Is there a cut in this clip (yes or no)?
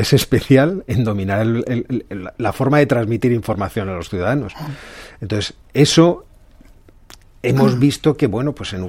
no